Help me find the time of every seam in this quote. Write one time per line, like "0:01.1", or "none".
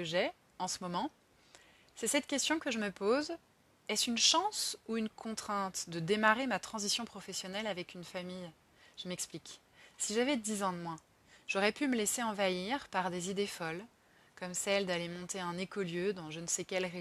none